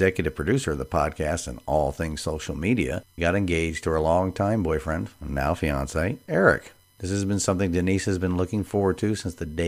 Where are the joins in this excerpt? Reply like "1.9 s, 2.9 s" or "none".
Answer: 3.2 s, 6.9 s